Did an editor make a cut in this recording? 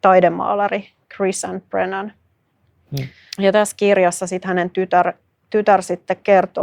yes; 1 cut; at 3.3 s

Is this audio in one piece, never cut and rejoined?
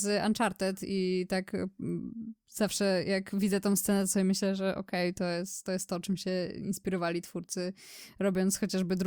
yes; 0 cuts

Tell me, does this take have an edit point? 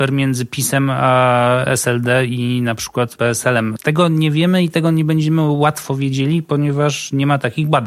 no; 0 cuts

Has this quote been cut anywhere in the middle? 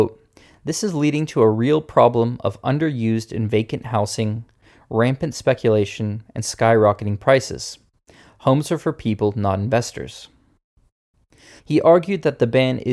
yes; 1 cut; at 11.6 s

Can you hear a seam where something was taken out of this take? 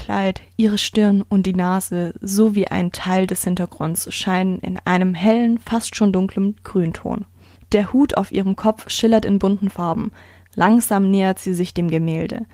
no; 0 cuts

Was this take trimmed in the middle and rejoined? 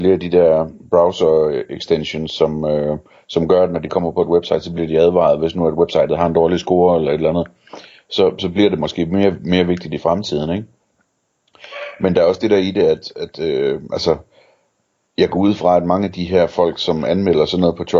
no; 0 cuts

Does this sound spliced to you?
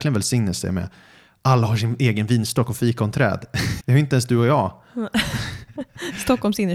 yes; 1 cut; at 3.8 s

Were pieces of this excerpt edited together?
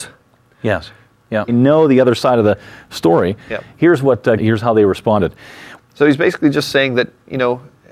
yes; 3 cuts; at 1.5 s, 4.4 s, 5.8 s

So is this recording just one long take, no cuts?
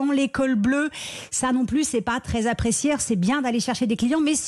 yes; 0 cuts

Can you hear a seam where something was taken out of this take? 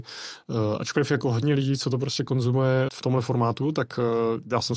yes; 1 cut; at 2.9 s

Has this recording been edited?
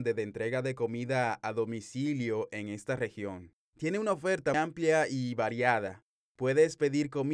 yes; 1 cut; at 4.5 s

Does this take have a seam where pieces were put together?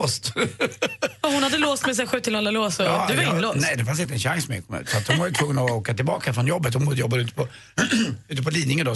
no; 0 cuts

